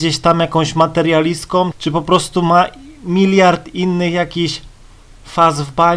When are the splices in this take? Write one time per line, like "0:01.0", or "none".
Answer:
0:01.7